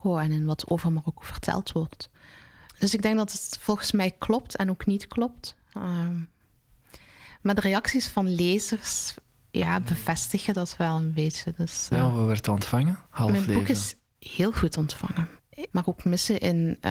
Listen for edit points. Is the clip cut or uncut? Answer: cut